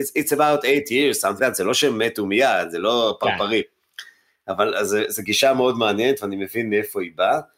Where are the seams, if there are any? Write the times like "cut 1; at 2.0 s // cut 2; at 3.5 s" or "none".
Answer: cut 1; at 1.4 s